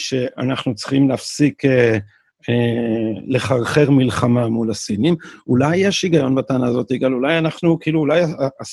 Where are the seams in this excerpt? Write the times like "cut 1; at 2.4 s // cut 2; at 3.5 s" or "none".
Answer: none